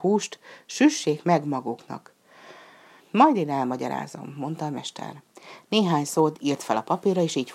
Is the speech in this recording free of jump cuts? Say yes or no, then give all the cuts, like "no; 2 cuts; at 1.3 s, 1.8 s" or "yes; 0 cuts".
no; 1 cut; at 3.0 s